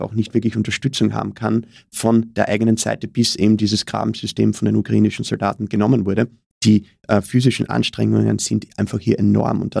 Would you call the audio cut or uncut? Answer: cut